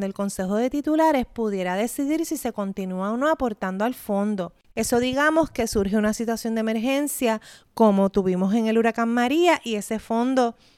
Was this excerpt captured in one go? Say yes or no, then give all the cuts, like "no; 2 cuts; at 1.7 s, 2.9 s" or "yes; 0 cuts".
no; 1 cut; at 4.7 s